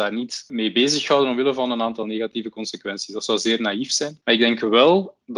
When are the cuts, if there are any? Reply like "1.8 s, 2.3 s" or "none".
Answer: 4.2 s